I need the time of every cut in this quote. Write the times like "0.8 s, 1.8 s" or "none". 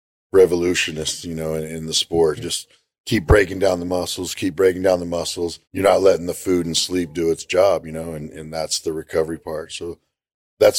2.4 s, 5.6 s